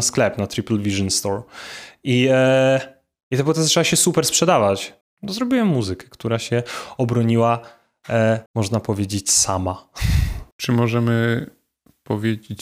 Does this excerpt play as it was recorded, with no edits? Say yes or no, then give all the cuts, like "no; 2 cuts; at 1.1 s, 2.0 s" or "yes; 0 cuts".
no; 3 cuts; at 5.0 s, 8.5 s, 10.5 s